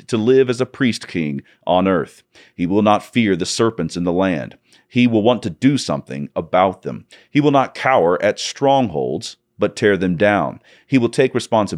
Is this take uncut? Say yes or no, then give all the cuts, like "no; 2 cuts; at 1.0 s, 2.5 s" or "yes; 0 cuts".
yes; 0 cuts